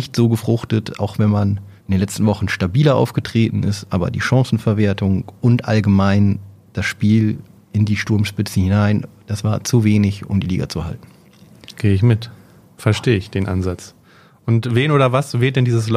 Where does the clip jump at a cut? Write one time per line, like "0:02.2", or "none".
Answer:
0:01.8